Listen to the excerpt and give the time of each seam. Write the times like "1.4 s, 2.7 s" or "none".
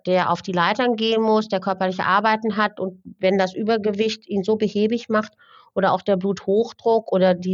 none